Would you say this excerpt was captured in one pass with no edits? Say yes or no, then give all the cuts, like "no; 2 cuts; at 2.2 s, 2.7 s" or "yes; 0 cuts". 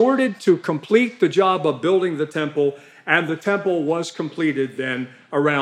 yes; 0 cuts